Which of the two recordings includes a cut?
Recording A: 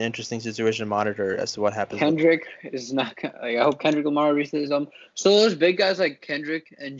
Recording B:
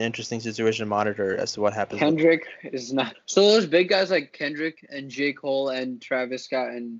B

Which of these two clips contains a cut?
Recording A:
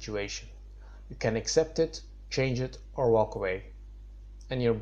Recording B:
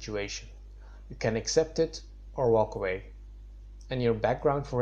B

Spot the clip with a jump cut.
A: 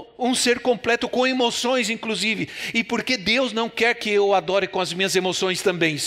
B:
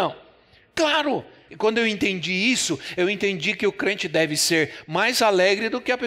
B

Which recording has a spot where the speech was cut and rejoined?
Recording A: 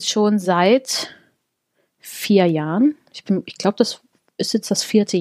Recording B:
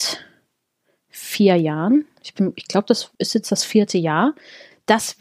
B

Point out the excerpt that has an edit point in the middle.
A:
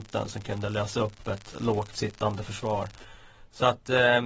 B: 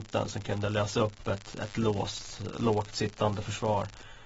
A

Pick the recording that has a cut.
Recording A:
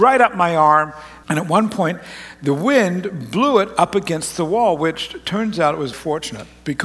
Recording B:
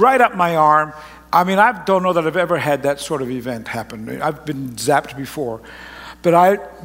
A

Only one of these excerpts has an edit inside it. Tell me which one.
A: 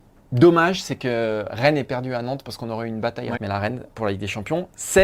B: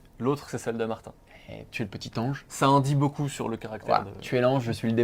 A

